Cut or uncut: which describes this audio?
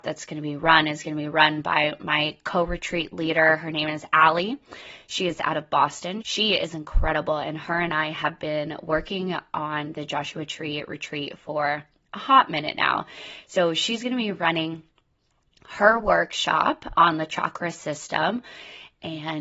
cut